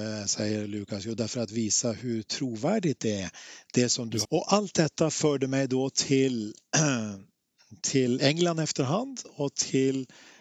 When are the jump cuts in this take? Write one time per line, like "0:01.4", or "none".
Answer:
0:04.2